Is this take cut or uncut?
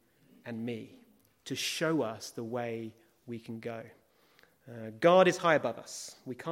uncut